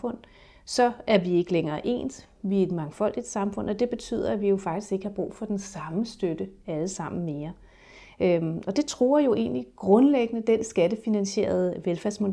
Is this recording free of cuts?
yes; 0 cuts

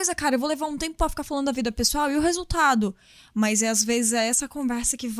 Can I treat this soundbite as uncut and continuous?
yes; 0 cuts

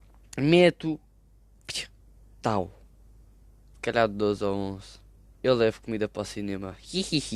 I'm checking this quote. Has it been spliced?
yes; 2 cuts; at 3.7 s, 5.3 s

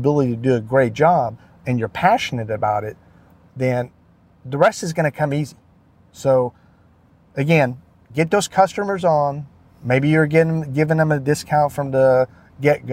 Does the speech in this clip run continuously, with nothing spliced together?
yes; 0 cuts

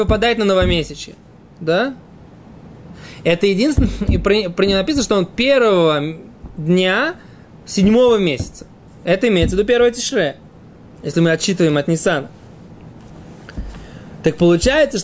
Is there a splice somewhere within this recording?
no; 0 cuts

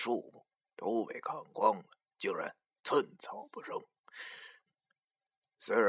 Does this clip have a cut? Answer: yes; 1 cut; at 4.7 s

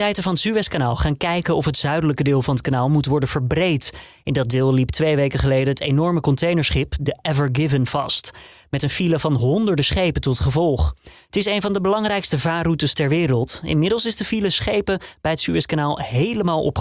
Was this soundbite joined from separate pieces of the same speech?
no; 0 cuts

